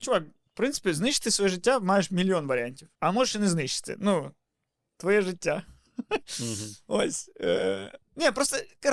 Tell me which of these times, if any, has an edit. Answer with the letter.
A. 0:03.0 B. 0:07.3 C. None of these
A